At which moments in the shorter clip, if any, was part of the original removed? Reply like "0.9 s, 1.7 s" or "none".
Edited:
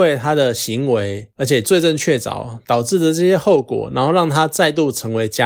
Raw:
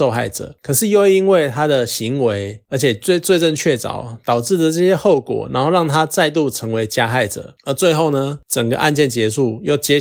1.6 s